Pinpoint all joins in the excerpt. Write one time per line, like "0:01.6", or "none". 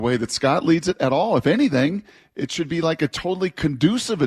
none